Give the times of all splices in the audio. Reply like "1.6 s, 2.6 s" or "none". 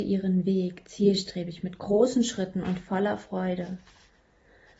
none